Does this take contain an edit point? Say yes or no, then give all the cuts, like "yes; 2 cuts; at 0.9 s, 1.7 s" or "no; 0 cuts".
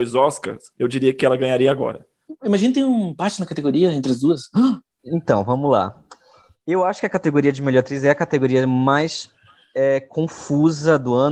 no; 0 cuts